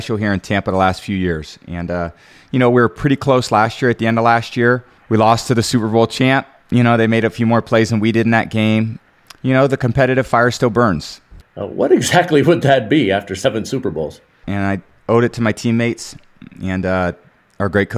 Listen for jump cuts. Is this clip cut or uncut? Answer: cut